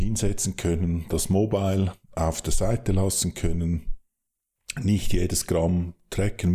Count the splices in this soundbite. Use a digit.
0